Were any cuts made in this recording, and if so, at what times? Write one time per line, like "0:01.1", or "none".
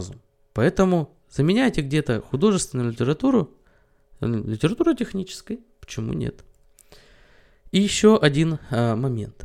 none